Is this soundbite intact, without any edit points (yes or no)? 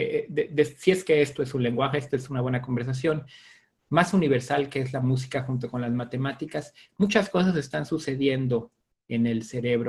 yes